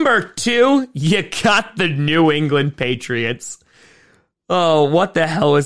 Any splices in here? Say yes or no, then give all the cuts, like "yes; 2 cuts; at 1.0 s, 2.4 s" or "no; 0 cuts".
no; 0 cuts